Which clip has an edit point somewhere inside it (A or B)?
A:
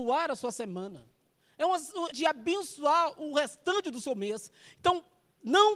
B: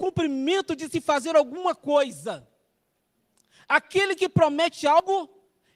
A